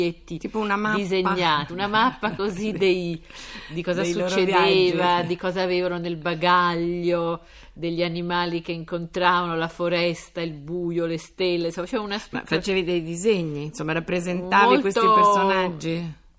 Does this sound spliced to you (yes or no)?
no